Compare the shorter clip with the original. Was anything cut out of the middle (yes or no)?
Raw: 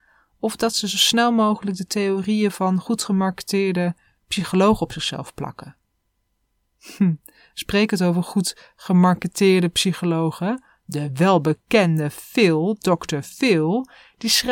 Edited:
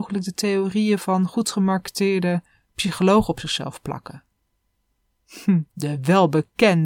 yes